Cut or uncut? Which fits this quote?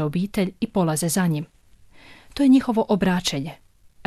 uncut